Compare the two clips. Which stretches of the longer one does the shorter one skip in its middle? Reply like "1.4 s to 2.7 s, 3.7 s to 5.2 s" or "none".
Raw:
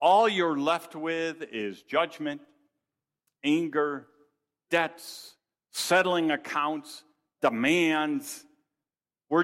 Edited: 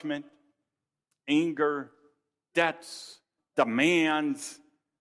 5.5 s to 7.2 s